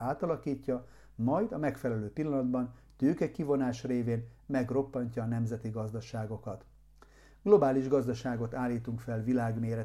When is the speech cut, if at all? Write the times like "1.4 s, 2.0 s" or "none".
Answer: none